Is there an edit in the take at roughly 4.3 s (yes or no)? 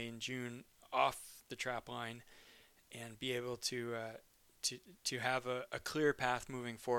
no